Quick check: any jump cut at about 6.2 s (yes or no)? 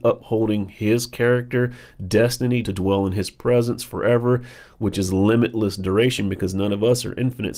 no